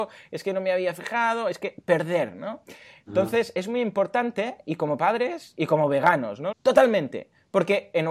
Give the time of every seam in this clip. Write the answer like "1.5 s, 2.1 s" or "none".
6.5 s